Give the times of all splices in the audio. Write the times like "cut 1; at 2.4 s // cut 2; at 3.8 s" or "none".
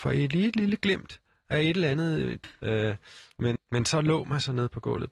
cut 1; at 2.4 s // cut 2; at 3.6 s